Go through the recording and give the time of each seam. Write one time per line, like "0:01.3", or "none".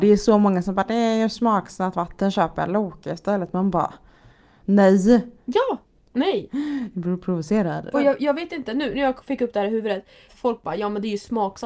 0:06.0
0:07.9
0:10.3